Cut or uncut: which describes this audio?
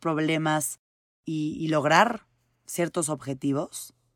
uncut